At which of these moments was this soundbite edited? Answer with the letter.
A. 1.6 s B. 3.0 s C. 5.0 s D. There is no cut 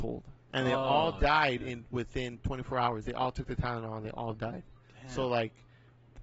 D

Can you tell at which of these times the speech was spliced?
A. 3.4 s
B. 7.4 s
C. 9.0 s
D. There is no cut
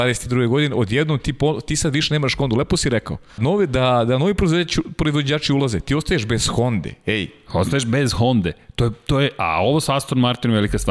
A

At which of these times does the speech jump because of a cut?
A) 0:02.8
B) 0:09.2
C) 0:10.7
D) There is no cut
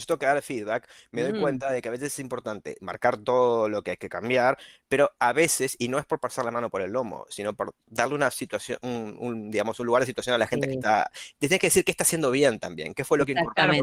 A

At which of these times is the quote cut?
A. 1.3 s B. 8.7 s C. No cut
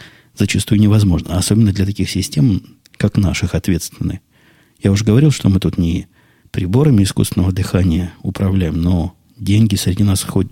C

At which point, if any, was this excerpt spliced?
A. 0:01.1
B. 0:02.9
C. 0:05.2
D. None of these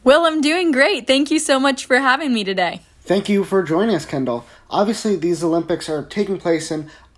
D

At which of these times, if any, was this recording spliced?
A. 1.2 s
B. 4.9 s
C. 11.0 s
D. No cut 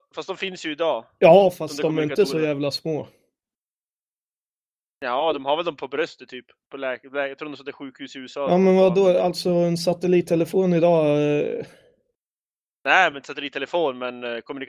D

